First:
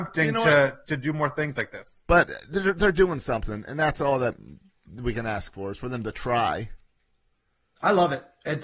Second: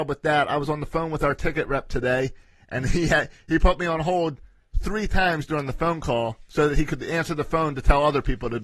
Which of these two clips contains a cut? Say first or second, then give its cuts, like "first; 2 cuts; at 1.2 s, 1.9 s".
first; 1 cut; at 2.0 s